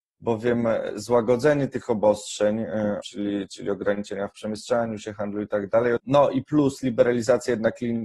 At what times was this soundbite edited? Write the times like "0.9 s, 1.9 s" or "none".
3.0 s, 6.0 s